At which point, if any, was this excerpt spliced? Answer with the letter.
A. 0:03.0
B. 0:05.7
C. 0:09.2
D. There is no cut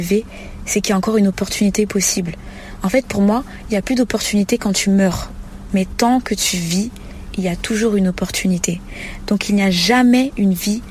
B